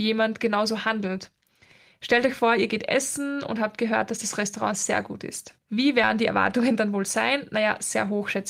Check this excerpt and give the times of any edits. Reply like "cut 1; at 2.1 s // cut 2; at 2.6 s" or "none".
cut 1; at 5.6 s